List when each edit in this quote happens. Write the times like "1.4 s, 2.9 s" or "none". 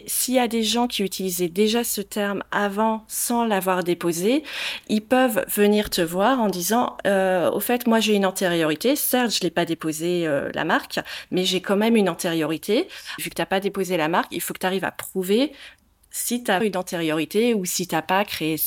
13.2 s, 16.6 s